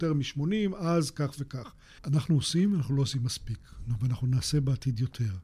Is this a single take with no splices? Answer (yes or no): no